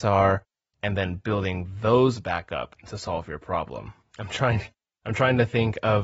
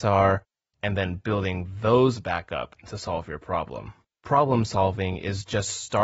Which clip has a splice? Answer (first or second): second